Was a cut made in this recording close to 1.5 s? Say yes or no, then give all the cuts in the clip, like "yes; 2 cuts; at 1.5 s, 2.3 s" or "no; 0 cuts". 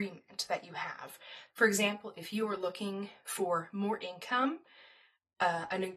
yes; 1 cut; at 1.5 s